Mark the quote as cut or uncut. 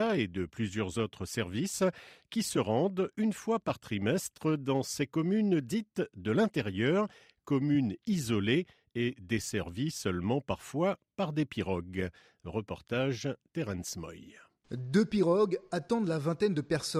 uncut